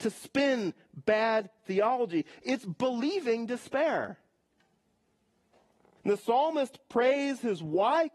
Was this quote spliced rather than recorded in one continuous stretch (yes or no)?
yes